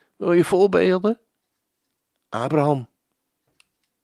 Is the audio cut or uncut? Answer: uncut